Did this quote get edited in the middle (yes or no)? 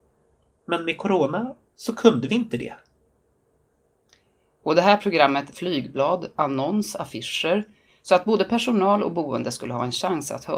yes